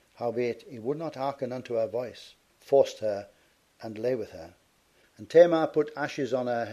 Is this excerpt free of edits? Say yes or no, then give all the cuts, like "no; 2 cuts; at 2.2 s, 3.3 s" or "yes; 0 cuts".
no; 2 cuts; at 2.5 s, 5.0 s